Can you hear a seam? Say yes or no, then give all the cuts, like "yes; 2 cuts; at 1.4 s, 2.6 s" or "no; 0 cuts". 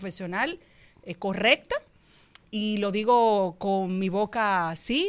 no; 0 cuts